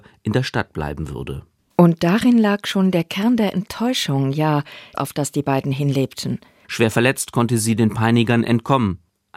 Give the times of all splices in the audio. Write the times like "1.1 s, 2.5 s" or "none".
4.9 s, 6.6 s